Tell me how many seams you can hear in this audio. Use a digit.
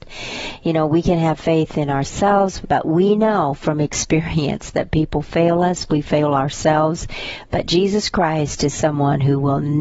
1